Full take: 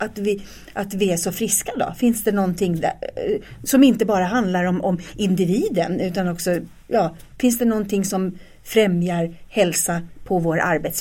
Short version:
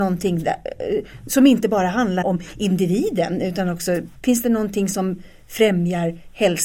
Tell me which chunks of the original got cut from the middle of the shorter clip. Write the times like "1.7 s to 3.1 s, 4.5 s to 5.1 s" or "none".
4.6 s to 4.8 s, 6.7 s to 7.3 s